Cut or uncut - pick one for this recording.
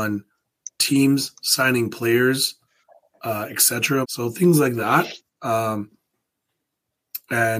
cut